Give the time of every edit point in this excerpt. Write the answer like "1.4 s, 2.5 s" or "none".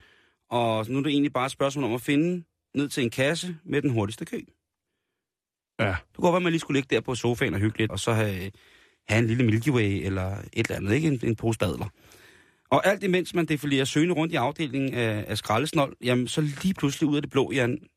6.1 s, 7.9 s